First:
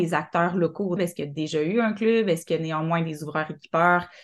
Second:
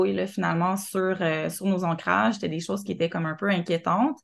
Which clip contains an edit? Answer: first; 1 cut; at 1.0 s

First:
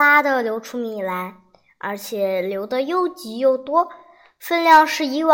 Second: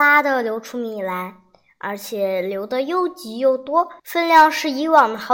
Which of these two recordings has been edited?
second; 1 cut; at 4.0 s

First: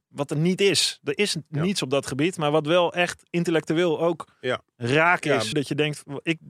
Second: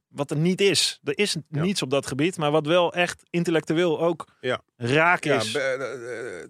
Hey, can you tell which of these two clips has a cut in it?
first; 1 cut; at 5.5 s

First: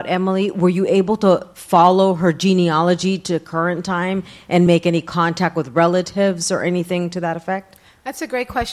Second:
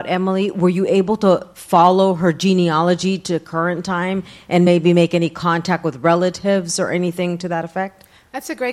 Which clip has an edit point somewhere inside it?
first; 1 cut; at 4.7 s

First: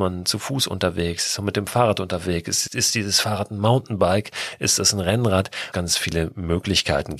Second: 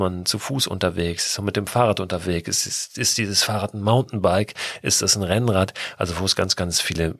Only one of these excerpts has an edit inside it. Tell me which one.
first; 2 cuts; at 2.7 s, 5.7 s

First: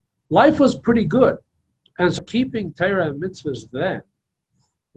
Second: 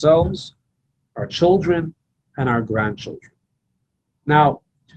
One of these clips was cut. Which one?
first; 1 cut; at 2.2 s

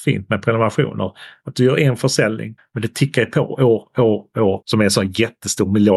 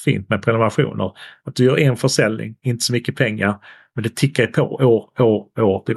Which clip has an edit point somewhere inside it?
first; 2 cuts; at 2.6 s, 4.6 s

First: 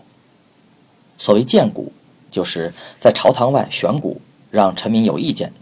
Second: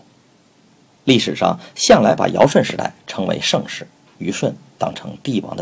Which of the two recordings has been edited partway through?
second; 2 cuts; at 1.0 s, 4.2 s

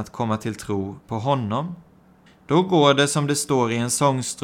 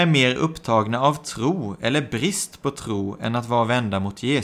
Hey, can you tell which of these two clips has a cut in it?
first; 1 cut; at 2.3 s

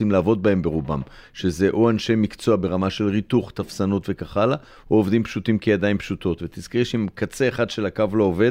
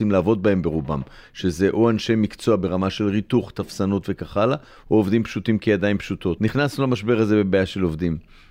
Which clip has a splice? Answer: second; 1 cut; at 6.4 s

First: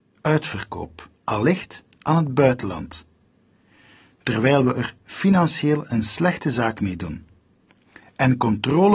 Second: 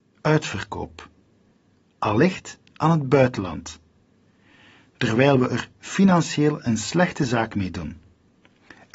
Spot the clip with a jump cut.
first; 1 cut; at 1.1 s

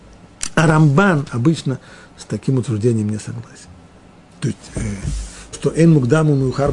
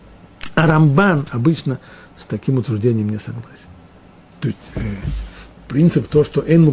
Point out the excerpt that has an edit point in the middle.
first; 1 cut; at 5.5 s

